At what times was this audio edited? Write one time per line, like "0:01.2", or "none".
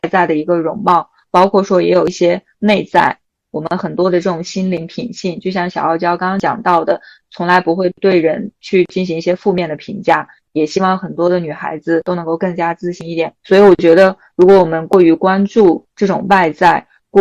0:13.4